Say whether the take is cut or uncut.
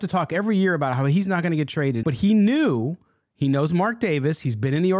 cut